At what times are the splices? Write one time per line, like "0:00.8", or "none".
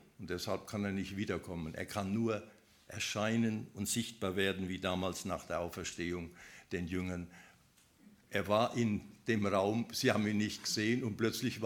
none